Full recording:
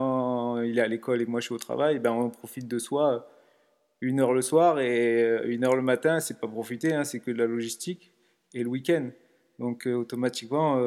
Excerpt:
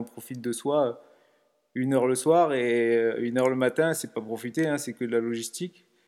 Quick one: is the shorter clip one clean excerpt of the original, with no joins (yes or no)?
yes